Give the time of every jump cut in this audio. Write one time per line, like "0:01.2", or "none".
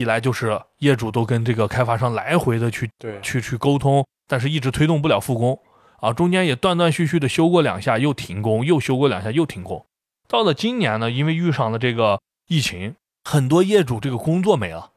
none